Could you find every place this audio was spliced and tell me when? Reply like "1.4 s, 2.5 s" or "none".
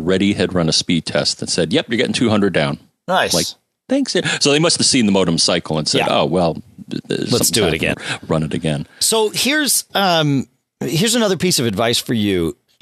7.9 s